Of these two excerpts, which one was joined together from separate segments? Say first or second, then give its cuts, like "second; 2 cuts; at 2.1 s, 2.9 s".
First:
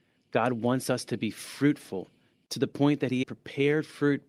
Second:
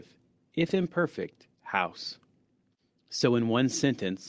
first; 1 cut; at 3.2 s